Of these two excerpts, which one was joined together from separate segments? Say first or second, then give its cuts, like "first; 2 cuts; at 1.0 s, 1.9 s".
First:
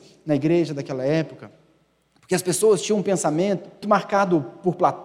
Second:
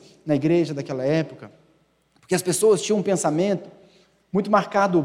first; 1 cut; at 3.8 s